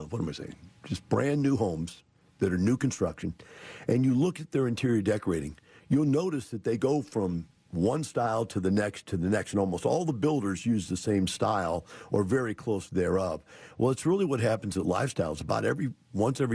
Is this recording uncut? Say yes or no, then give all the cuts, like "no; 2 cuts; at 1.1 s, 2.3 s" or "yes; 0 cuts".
yes; 0 cuts